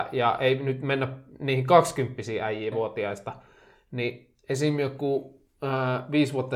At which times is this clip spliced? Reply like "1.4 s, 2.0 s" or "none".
2.7 s